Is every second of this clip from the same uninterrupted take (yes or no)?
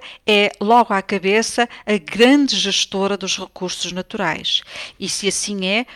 no